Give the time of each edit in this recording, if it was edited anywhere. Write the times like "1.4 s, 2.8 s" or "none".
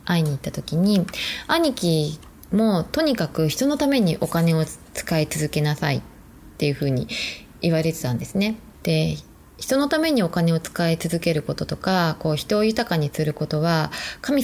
8.7 s